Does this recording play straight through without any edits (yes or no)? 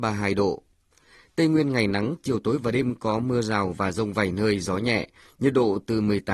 yes